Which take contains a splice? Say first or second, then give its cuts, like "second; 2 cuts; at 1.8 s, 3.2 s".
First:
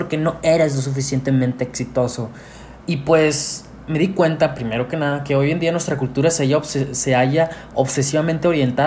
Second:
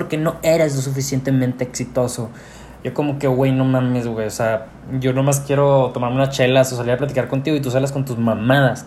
first; 1 cut; at 2.8 s